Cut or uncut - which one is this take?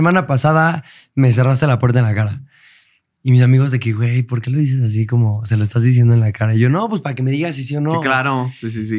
uncut